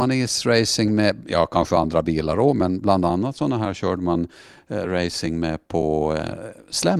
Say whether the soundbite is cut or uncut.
uncut